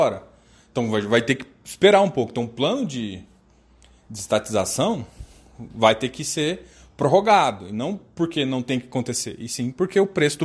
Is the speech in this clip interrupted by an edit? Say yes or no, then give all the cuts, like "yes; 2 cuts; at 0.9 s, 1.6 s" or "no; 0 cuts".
no; 0 cuts